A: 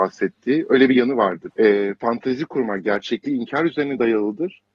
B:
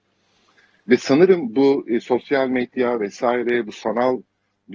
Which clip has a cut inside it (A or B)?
A